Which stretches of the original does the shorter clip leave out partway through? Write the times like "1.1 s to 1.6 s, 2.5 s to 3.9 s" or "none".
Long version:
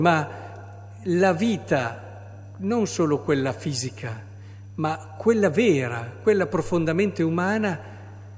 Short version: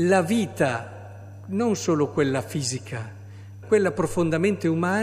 4.7 s to 6.2 s

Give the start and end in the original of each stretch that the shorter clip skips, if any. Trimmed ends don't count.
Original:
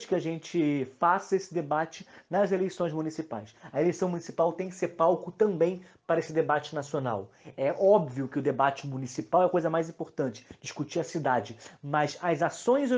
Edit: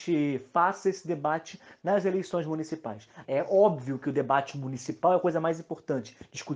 3.7 s to 7.5 s

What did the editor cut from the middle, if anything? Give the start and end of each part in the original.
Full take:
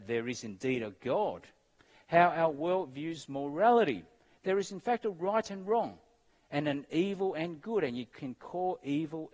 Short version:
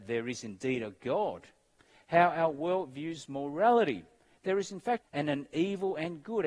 5.0 s to 6.4 s

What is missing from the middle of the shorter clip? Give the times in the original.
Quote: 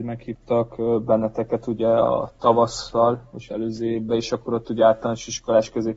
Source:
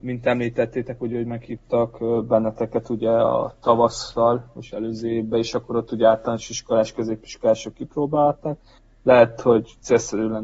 none

